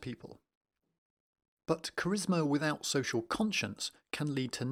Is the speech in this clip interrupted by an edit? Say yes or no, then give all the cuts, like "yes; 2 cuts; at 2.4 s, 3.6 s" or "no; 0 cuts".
no; 0 cuts